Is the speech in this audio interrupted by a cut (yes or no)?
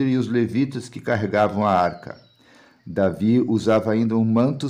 no